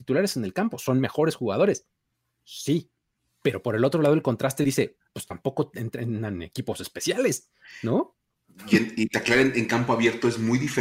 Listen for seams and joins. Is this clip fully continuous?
yes; 0 cuts

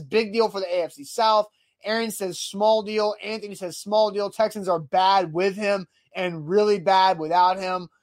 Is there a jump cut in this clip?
no; 0 cuts

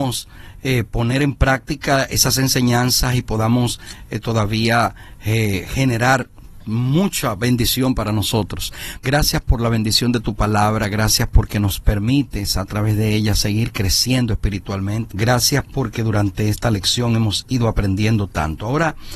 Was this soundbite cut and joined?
yes; 2 cuts; at 9.0 s, 15.1 s

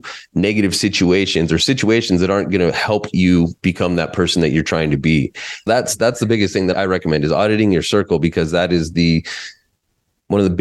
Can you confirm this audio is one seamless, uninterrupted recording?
no; 2 cuts; at 5.7 s, 6.7 s

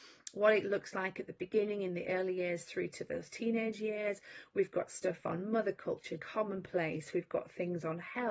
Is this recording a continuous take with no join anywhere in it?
no; 1 cut; at 6.2 s

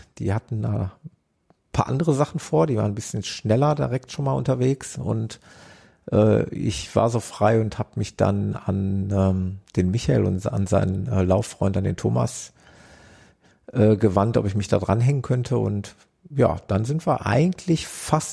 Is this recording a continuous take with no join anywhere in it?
yes; 0 cuts

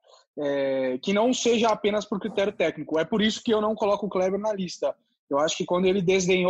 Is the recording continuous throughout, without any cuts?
yes; 0 cuts

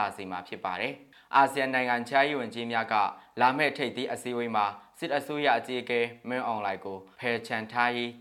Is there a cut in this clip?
yes; 1 cut; at 7.1 s

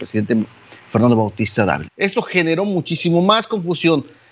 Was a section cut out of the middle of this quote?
yes; 1 cut; at 1.8 s

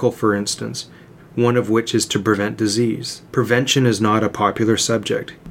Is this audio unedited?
no; 2 cuts; at 1.2 s, 3.3 s

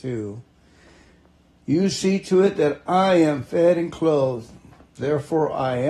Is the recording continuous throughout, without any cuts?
no; 1 cut; at 5.0 s

